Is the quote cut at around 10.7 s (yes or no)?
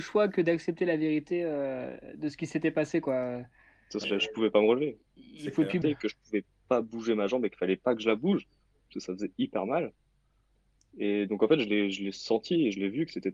no